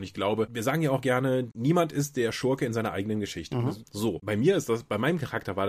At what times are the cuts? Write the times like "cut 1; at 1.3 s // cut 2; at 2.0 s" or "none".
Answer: cut 1; at 3.8 s